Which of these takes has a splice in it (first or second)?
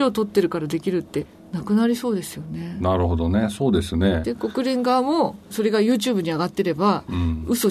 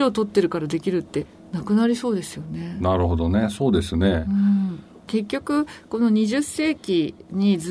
first